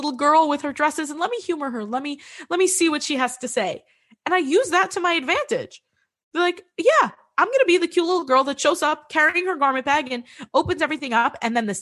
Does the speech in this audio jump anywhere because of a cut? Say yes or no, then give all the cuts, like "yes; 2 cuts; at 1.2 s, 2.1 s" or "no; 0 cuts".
no; 0 cuts